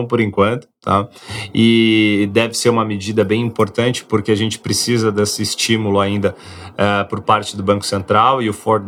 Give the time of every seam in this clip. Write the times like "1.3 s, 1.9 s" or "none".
none